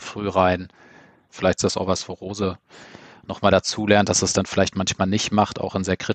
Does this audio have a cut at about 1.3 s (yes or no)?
yes